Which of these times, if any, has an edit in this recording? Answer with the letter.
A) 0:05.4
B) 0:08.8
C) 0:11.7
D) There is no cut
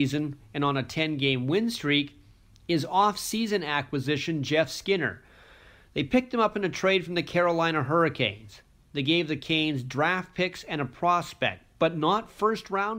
D